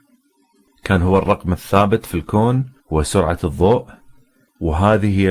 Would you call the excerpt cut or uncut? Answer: cut